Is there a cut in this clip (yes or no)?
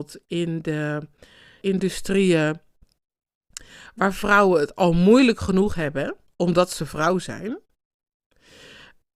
yes